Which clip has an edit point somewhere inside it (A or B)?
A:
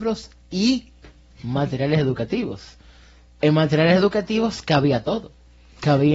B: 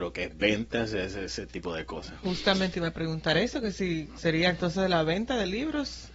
B